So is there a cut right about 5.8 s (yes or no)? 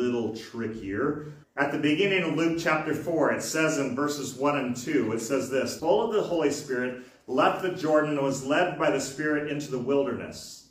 yes